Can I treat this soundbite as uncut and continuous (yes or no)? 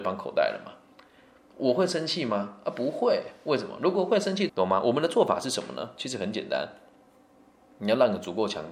no